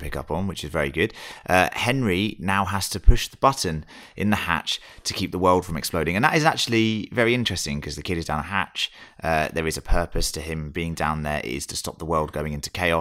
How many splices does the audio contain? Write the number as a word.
zero